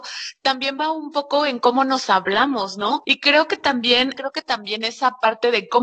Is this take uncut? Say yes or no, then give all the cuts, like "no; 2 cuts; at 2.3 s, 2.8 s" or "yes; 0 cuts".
no; 2 cuts; at 3.0 s, 4.1 s